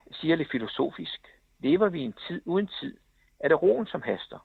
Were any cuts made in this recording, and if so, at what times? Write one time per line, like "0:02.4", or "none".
0:01.6